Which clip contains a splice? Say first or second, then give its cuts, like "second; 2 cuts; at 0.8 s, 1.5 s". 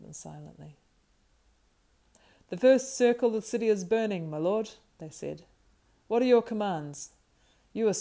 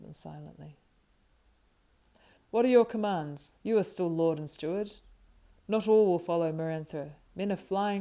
second; 2 cuts; at 2.4 s, 3.6 s